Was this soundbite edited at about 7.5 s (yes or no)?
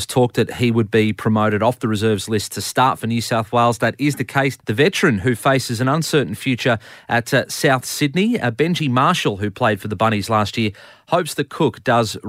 no